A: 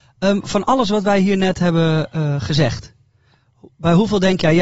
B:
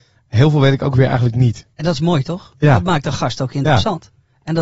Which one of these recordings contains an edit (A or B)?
B